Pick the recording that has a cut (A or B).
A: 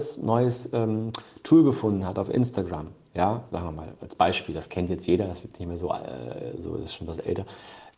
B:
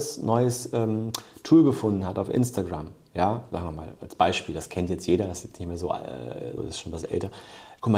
B